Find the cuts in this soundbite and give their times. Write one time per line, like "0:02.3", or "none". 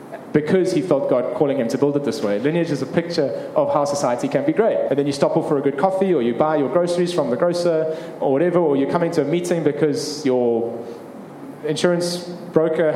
0:04.9